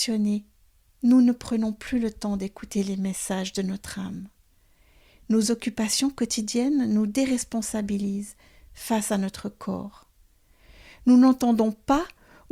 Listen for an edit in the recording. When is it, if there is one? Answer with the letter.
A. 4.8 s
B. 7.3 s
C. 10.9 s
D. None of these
D